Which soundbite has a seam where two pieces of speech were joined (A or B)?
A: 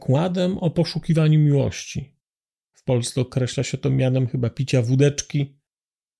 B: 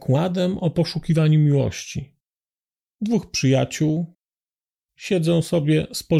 A